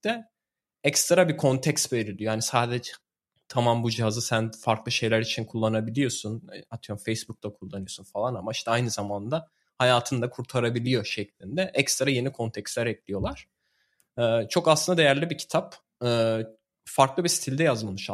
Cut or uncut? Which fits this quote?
uncut